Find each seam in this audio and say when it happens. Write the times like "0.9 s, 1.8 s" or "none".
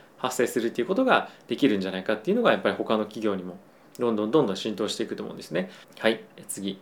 5.8 s